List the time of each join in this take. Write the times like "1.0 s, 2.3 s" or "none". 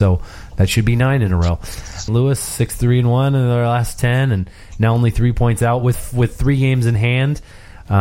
2.1 s